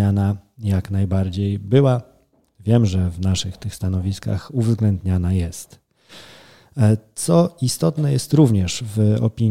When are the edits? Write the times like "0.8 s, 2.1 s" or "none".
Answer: none